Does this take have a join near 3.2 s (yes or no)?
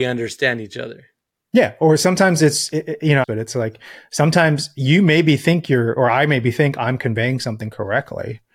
yes